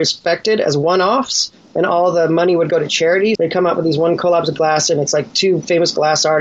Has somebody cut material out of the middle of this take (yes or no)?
yes